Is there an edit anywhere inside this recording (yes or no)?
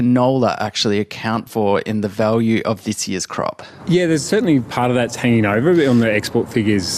no